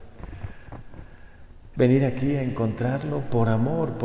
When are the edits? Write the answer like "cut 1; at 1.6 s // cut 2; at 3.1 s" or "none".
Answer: cut 1; at 1.7 s

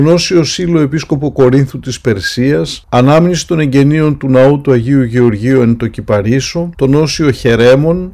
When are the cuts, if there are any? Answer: cut 1; at 6.7 s

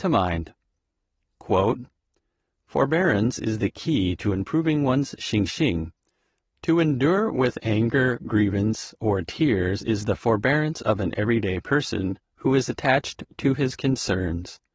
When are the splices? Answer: none

